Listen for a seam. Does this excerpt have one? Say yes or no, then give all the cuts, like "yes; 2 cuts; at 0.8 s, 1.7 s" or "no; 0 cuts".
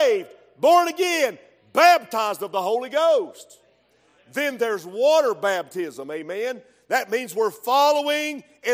no; 0 cuts